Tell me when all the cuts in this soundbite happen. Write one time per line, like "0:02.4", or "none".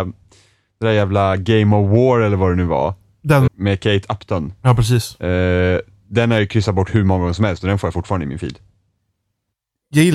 0:03.5